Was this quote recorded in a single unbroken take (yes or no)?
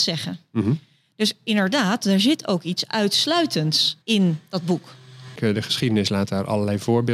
no